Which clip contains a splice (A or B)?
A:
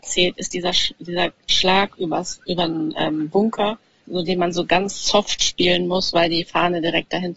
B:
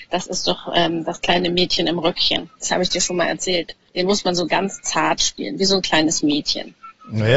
B